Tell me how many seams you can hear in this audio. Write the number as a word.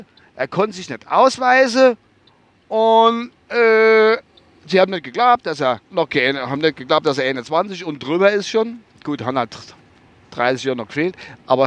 one